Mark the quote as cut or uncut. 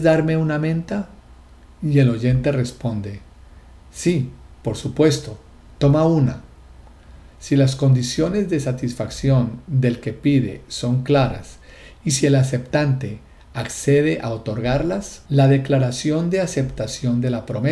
cut